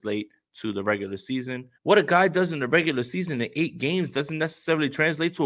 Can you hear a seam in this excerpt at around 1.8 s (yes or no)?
yes